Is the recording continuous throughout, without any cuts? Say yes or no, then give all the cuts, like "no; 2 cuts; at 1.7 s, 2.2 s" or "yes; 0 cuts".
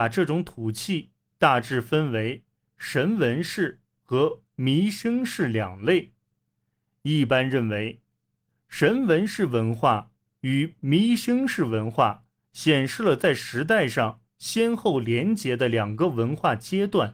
yes; 0 cuts